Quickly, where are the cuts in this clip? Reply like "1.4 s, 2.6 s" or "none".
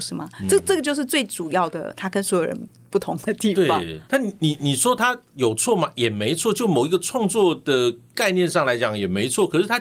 4.1 s